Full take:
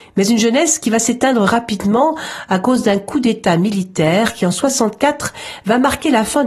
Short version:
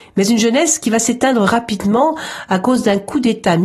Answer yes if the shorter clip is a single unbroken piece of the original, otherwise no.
yes